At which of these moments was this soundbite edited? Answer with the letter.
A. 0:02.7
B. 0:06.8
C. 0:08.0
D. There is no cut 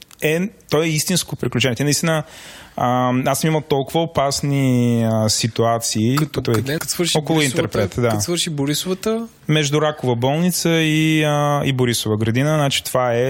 B